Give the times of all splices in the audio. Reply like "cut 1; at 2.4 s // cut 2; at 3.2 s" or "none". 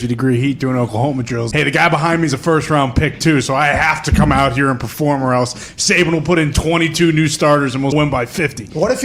cut 1; at 1.5 s // cut 2; at 7.9 s